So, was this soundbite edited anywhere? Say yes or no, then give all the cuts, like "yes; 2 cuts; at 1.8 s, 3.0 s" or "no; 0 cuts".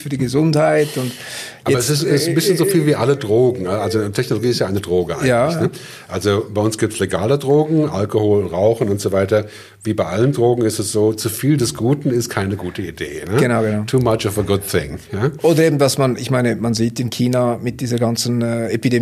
no; 0 cuts